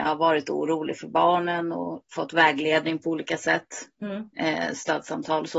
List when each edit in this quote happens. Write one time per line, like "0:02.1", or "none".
0:04.3